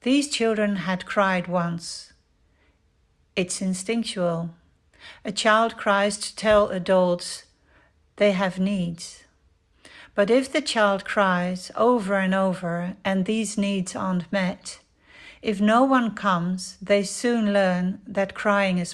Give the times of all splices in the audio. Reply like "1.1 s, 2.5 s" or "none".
none

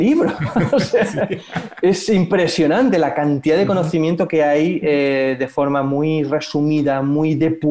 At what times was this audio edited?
none

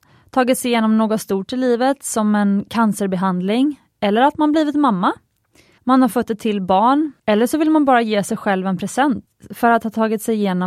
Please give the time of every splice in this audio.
5.8 s, 7.2 s

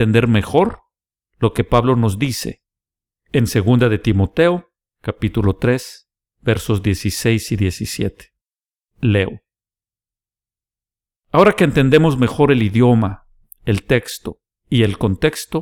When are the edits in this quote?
11.1 s

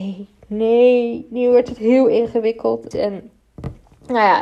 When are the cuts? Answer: 2.9 s

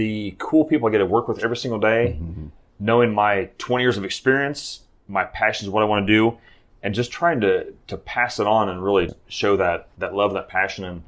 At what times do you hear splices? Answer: 9.1 s

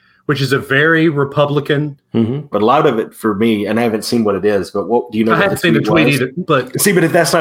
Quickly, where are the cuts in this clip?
2.5 s, 6.5 s

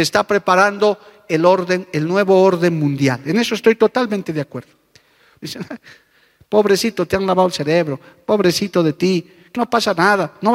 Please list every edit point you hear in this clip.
5.4 s, 9.6 s

